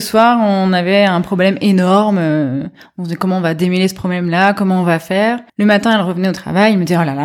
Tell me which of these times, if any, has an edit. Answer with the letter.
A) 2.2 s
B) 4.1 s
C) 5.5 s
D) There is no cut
C